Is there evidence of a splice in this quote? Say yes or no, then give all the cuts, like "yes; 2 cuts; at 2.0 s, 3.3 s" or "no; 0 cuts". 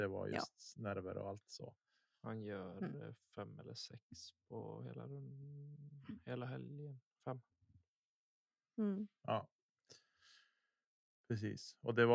no; 0 cuts